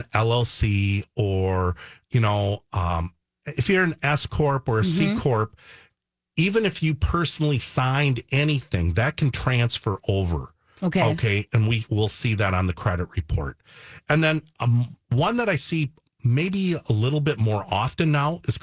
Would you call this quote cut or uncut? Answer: uncut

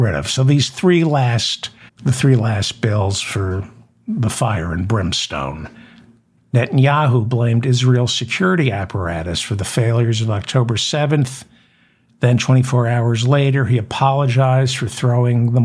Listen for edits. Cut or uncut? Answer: cut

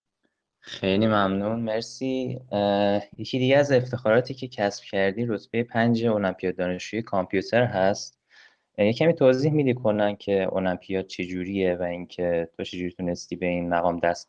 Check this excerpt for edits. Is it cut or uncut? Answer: uncut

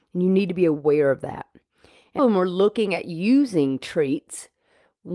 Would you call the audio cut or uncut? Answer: cut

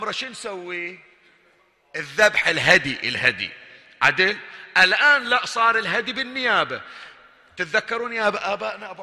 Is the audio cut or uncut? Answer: uncut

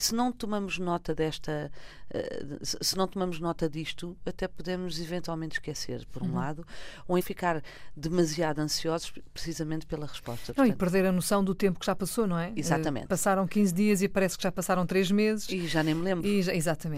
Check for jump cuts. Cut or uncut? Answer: cut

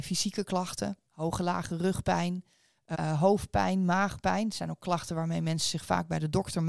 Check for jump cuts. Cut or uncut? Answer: cut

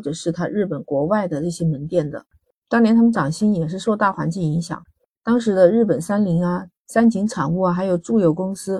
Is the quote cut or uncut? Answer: uncut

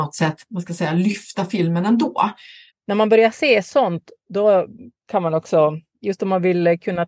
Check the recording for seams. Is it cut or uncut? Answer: cut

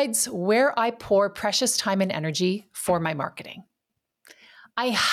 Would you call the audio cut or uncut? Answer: uncut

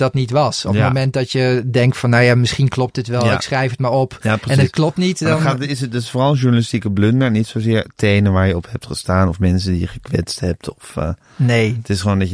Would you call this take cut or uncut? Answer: uncut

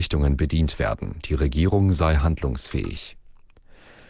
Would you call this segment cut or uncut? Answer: uncut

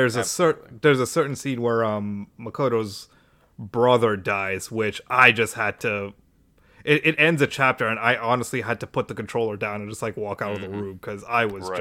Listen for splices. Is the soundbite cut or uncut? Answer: uncut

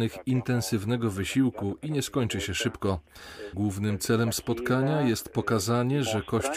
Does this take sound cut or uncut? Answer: cut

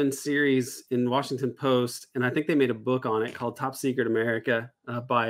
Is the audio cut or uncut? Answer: uncut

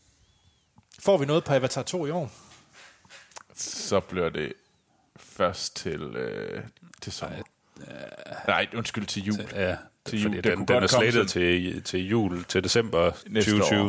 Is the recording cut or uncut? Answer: uncut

